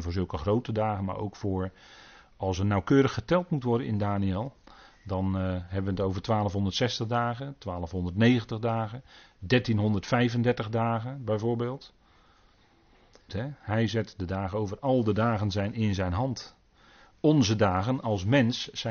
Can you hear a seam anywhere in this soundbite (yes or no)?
yes